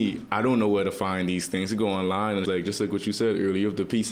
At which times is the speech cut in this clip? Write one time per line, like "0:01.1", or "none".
0:02.4